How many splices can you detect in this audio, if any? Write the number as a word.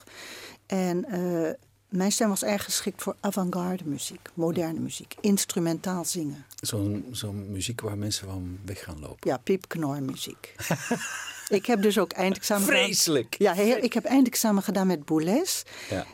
one